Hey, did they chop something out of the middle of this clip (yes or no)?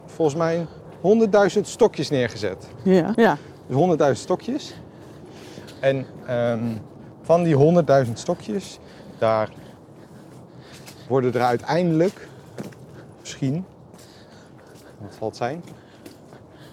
yes